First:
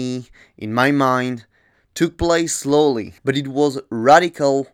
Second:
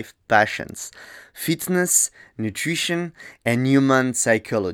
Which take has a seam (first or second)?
first